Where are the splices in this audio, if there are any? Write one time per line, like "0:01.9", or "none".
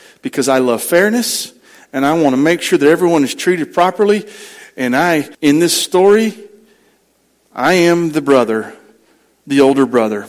0:05.3